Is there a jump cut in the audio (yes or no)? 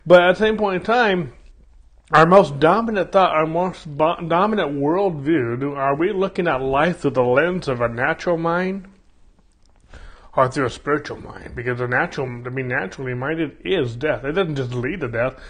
no